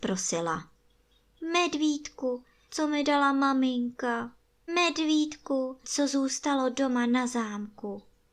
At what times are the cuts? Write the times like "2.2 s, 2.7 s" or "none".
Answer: 2.7 s, 4.7 s, 5.8 s